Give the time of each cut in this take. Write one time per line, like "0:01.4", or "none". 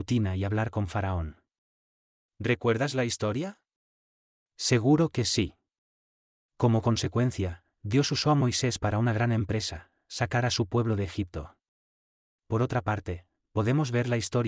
none

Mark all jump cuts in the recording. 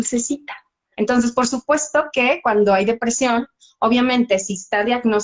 0:00.9

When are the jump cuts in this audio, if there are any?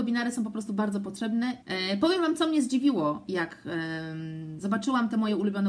0:01.6

